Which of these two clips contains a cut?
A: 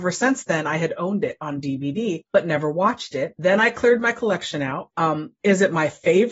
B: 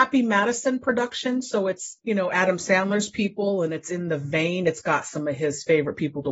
A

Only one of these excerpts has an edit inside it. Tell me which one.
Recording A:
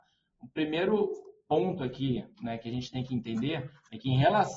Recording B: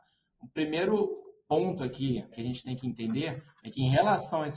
B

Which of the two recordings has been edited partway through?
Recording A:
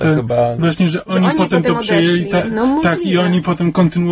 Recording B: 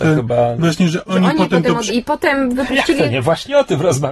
B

